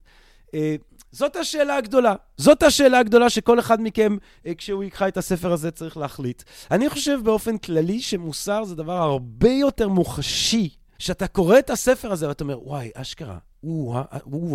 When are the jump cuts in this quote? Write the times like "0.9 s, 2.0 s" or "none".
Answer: 11.0 s